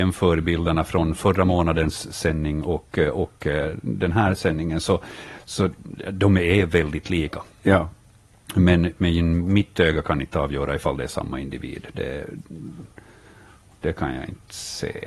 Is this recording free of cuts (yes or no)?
yes